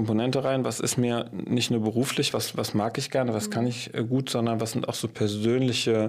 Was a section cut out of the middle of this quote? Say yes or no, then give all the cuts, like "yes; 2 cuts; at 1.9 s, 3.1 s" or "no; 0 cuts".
no; 0 cuts